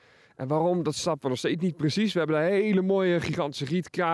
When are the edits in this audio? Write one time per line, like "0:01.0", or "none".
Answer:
none